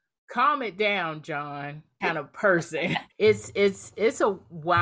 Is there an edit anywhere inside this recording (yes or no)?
yes